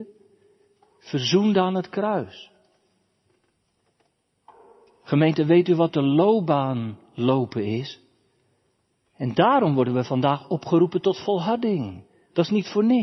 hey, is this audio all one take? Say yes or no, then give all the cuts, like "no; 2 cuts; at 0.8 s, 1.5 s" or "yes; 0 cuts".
no; 1 cut; at 9.0 s